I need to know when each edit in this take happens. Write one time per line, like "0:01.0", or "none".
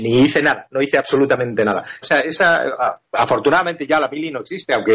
0:02.0